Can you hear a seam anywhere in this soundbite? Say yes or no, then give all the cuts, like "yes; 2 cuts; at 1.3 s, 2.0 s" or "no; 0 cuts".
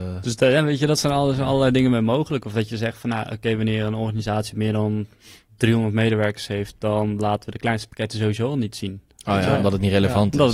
no; 0 cuts